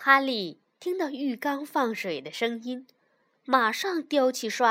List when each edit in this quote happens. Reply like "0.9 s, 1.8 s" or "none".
none